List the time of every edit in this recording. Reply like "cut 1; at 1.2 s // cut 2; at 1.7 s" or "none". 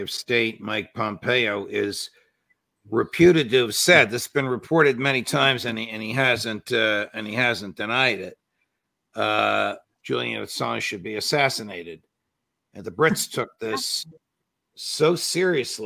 cut 1; at 9.8 s